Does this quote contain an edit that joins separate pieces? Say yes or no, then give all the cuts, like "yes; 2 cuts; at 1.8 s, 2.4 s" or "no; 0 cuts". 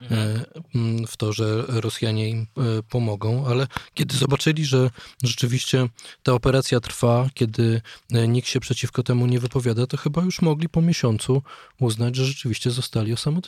no; 0 cuts